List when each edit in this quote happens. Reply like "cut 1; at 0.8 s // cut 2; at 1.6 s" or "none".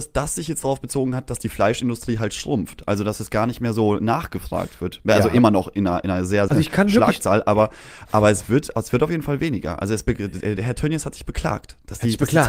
cut 1; at 6.5 s